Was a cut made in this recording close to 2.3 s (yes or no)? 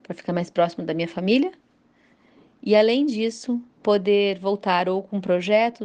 no